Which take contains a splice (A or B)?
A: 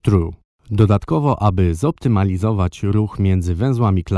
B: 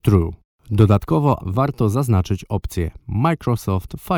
B